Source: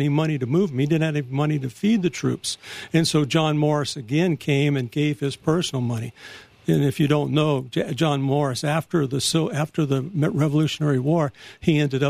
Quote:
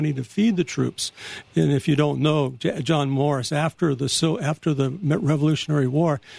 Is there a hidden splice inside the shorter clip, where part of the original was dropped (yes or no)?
yes